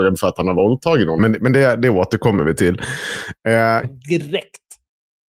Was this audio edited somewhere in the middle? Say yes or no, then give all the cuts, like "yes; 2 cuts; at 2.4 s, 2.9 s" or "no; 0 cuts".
yes; 2 cuts; at 1.2 s, 3.8 s